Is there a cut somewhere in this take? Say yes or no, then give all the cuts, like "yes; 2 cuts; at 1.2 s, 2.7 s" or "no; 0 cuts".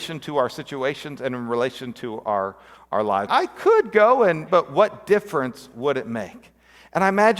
yes; 2 cuts; at 3.3 s, 4.5 s